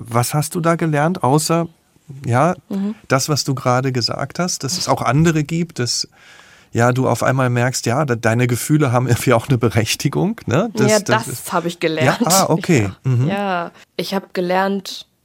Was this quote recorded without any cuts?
no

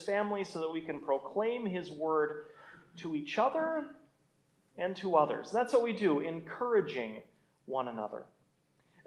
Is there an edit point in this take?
no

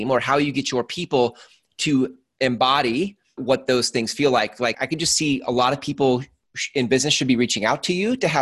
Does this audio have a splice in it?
yes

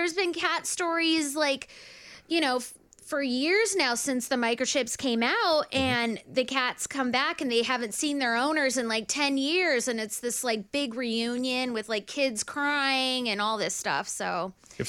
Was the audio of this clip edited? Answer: no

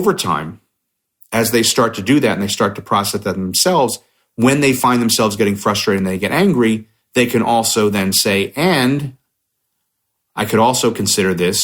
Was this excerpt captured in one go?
yes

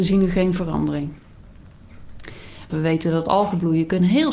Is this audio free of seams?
no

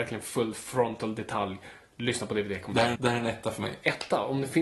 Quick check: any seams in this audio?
yes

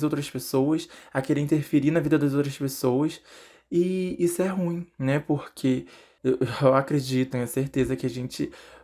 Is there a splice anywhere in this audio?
yes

